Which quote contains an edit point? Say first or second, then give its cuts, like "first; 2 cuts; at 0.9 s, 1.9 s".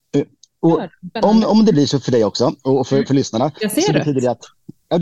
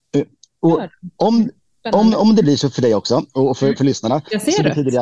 first; 1 cut; at 1.2 s